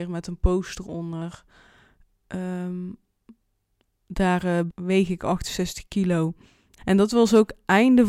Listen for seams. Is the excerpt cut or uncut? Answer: cut